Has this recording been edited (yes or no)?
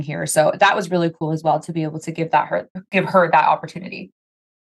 no